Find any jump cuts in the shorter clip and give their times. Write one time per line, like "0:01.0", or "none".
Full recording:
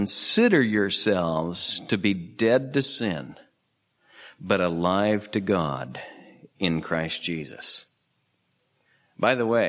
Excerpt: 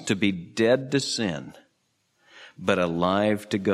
none